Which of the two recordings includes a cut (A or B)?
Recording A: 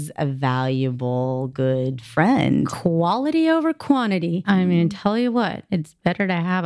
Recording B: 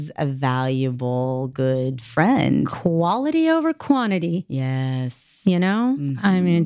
A